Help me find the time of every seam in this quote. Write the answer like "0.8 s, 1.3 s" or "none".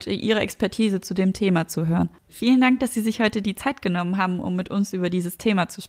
2.3 s